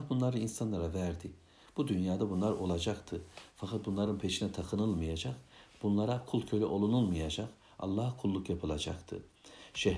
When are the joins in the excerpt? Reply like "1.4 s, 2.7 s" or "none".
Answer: none